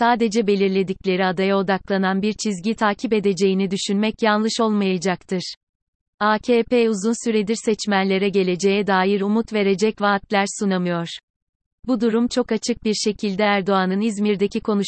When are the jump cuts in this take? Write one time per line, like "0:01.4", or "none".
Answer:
none